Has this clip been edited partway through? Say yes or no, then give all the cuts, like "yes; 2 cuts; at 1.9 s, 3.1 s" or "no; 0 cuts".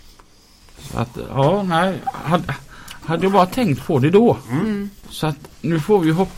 no; 0 cuts